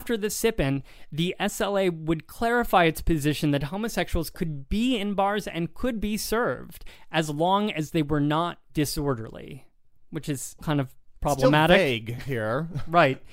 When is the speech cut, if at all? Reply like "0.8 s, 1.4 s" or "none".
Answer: 8.7 s, 10.6 s